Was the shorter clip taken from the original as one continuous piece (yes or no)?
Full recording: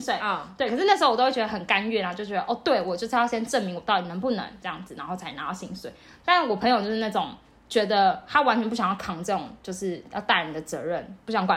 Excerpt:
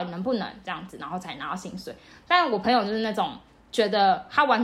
yes